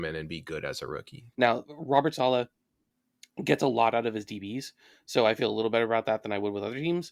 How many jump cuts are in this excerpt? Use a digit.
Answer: 1